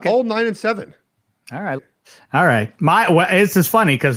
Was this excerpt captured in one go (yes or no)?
no